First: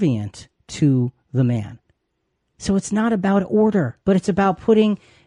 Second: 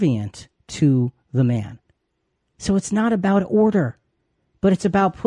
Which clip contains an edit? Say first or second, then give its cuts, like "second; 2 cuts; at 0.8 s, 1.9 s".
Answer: first; 1 cut; at 4.0 s